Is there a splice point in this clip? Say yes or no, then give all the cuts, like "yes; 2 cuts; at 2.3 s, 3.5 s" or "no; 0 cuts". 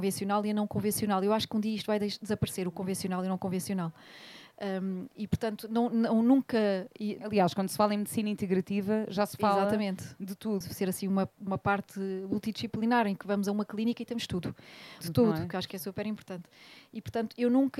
yes; 2 cuts; at 10.6 s, 15.0 s